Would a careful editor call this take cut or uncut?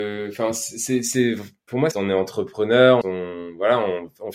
cut